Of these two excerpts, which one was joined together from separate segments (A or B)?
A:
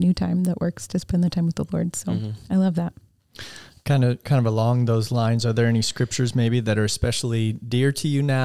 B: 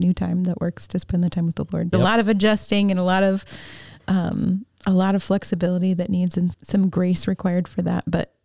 B